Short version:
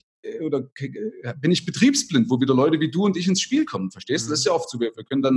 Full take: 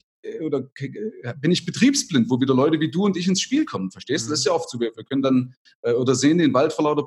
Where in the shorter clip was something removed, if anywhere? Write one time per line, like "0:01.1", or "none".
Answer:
none